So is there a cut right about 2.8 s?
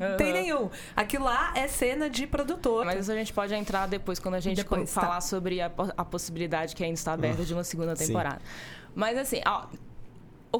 yes; 1 cut; at 2.8 s

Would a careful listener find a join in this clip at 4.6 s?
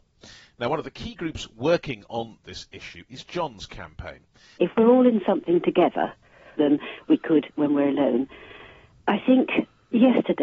yes; 2 cuts; at 4.6 s, 6.6 s

